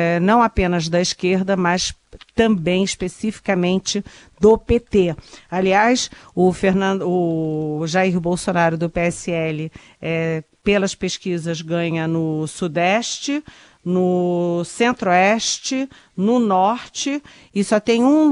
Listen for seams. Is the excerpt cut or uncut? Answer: uncut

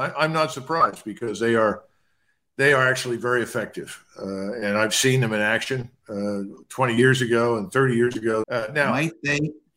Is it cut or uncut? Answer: cut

